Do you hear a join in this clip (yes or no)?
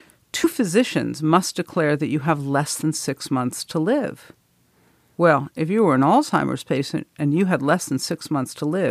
no